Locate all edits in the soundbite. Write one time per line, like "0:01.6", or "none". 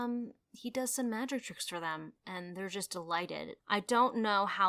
0:03.6